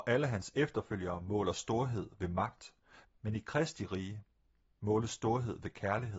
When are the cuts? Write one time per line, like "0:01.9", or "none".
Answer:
0:03.0